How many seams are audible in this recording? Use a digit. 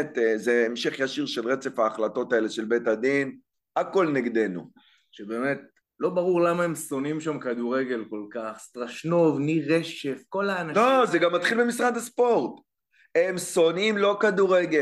0